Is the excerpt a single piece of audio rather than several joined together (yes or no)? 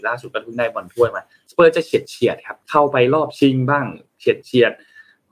no